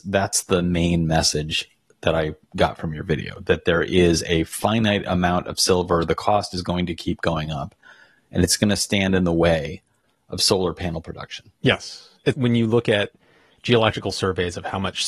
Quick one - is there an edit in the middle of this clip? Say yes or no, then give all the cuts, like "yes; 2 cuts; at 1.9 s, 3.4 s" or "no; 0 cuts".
yes; 1 cut; at 12.3 s